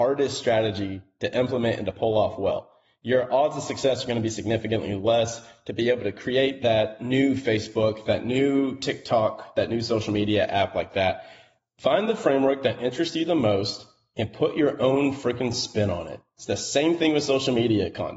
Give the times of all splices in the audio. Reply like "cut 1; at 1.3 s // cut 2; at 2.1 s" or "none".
cut 1; at 11.6 s